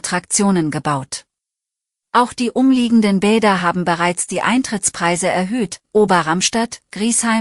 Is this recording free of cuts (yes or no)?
no